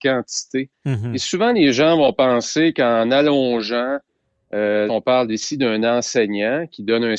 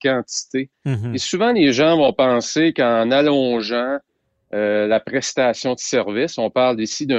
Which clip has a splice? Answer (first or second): first